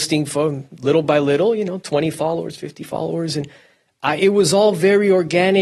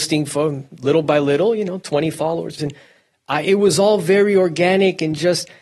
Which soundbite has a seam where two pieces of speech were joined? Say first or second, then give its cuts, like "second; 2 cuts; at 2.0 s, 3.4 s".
second; 1 cut; at 2.6 s